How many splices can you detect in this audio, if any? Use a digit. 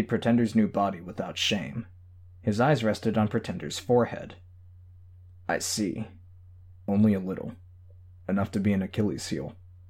1